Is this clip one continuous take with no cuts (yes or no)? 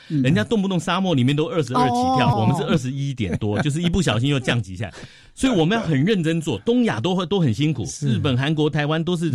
no